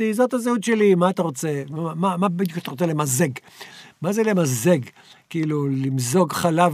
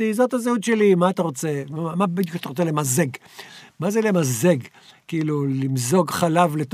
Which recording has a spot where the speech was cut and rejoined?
second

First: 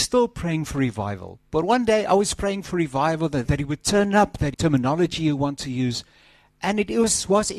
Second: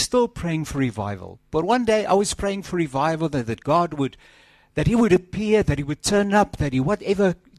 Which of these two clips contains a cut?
first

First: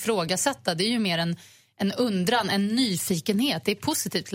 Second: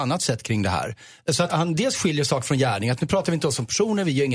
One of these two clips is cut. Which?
second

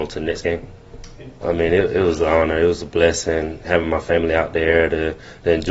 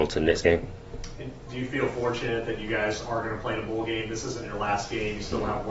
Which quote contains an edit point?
first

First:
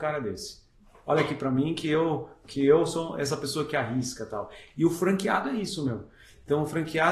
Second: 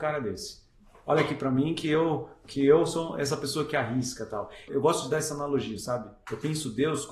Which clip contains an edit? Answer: second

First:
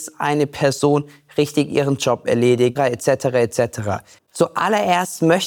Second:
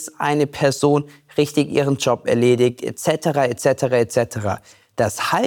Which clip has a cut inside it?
first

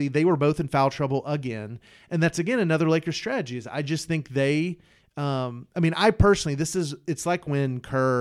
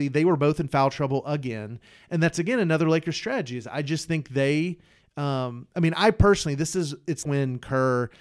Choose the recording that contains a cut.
second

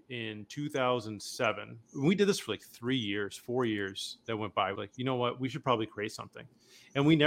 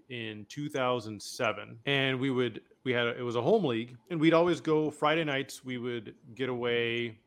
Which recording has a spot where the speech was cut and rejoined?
first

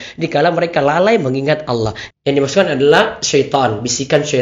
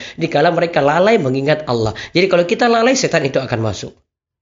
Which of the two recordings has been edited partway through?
first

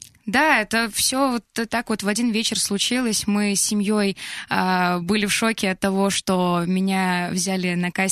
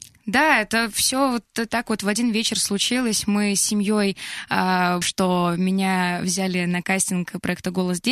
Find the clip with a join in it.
second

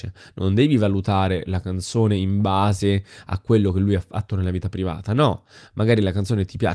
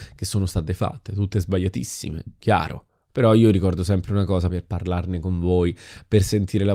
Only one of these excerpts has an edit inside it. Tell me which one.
second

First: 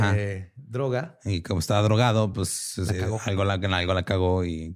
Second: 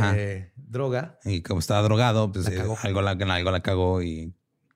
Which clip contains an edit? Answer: second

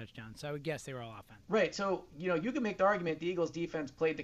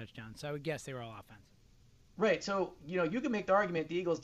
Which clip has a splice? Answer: first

